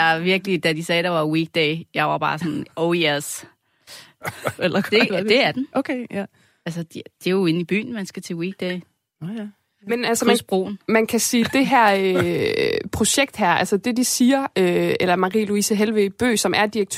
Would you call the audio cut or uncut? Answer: cut